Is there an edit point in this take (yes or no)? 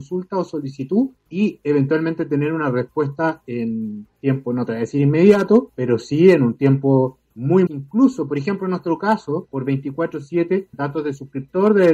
yes